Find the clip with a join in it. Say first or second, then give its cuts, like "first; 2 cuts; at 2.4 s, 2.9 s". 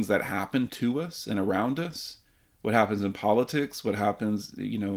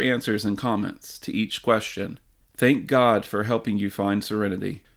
second; 1 cut; at 2.4 s